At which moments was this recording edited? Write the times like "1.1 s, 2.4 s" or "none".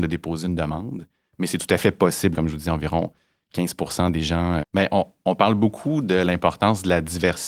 2.3 s, 4.6 s